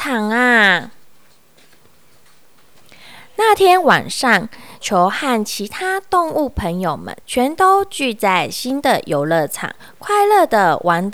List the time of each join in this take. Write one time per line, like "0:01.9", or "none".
0:04.8
0:07.2